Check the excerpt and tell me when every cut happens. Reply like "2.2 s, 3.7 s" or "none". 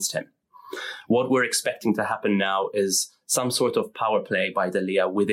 none